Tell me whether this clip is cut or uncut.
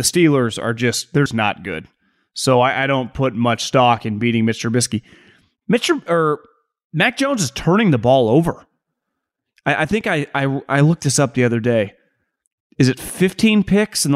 cut